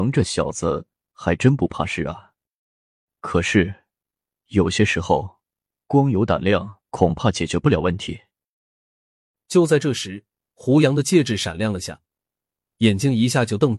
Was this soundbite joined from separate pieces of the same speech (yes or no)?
yes